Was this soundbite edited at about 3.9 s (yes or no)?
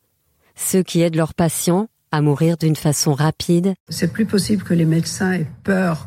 yes